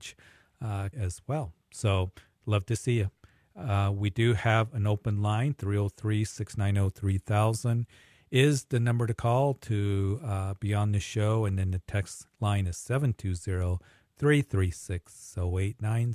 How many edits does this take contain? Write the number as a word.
one